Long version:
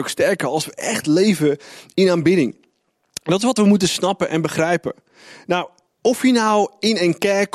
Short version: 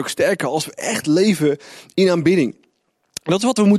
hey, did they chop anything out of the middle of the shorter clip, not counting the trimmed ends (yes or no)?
no